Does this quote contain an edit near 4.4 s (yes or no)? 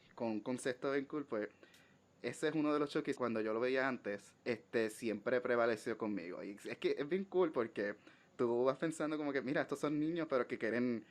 yes